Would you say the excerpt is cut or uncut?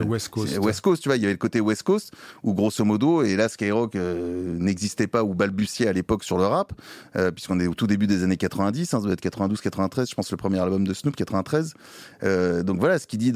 uncut